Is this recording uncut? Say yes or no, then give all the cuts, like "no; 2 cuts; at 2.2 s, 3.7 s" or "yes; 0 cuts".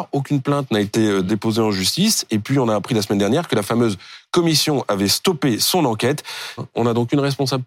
no; 1 cut; at 6.6 s